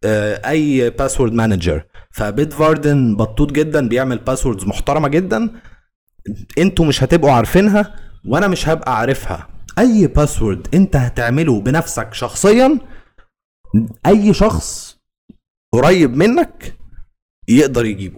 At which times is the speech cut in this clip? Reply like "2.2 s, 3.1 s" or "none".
none